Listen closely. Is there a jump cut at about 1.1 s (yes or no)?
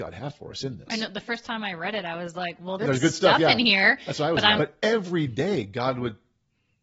no